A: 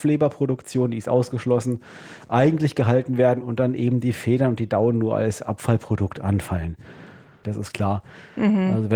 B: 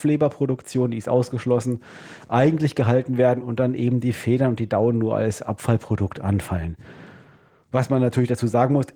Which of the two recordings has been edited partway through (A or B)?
A